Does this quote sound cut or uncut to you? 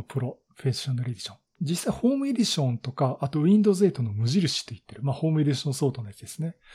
cut